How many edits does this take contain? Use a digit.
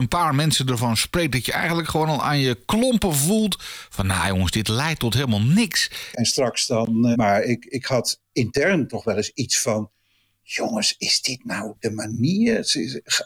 2